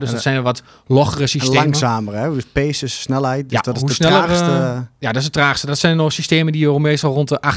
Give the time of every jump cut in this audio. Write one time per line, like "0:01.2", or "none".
none